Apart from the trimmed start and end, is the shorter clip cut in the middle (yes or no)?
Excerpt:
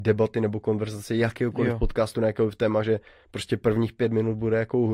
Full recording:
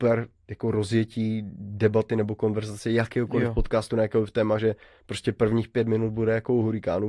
no